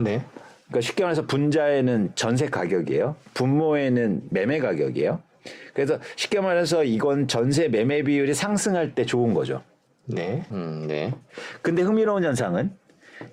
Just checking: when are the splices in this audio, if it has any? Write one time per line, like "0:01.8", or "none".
0:10.5